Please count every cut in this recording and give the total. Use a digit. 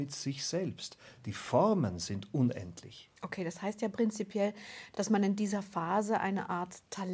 0